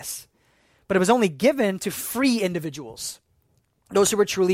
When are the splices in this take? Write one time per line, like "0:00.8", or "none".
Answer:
none

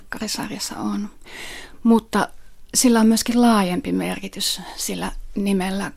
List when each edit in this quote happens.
none

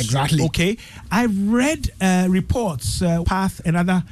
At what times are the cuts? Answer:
0:03.2

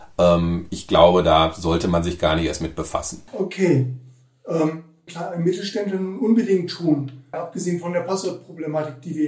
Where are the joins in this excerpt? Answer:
0:03.3
0:05.1
0:07.3

